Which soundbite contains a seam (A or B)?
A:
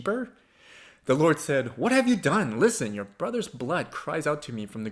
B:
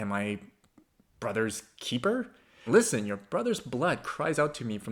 B